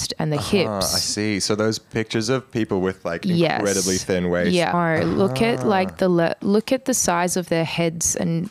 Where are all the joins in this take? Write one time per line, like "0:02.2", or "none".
0:04.7